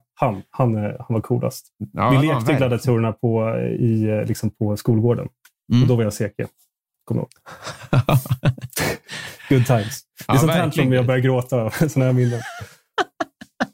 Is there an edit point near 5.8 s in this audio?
no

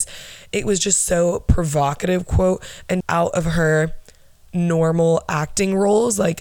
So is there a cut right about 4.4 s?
no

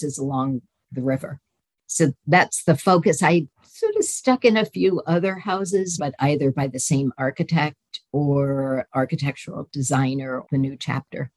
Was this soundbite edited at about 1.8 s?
no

